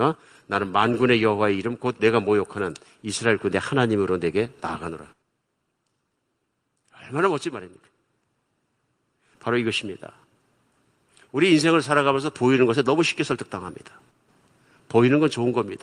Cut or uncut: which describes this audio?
cut